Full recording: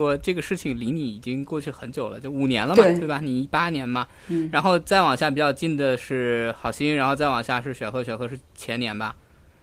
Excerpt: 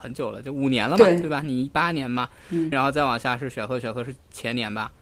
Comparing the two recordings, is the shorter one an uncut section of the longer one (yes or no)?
no